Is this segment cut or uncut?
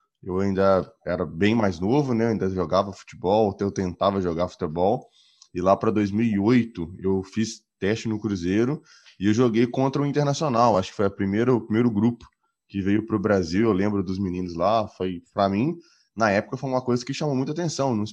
uncut